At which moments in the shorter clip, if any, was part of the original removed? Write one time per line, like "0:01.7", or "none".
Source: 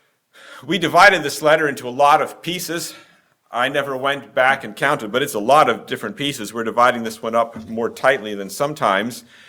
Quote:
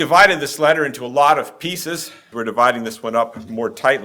0:02.3